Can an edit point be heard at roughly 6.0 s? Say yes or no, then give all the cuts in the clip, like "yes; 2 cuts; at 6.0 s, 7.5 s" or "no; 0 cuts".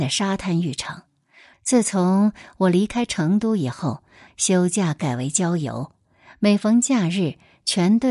no; 2 cuts; at 1.5 s, 4.3 s